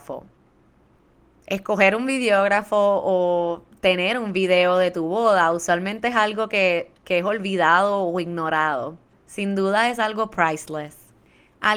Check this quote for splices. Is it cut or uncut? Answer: cut